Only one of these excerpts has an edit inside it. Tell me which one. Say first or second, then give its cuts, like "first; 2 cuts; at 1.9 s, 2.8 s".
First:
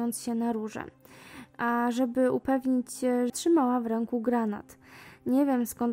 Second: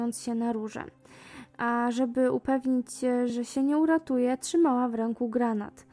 first; 1 cut; at 3.3 s